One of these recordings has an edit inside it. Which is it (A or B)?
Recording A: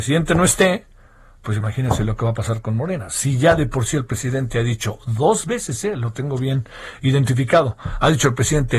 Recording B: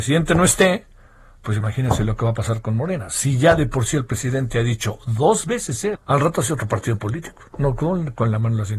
B